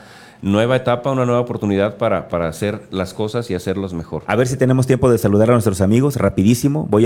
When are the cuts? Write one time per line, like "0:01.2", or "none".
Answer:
0:02.3